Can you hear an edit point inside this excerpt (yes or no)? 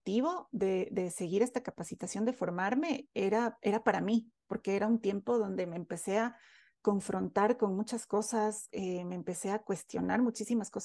no